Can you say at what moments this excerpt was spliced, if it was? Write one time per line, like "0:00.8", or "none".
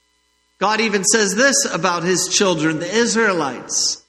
none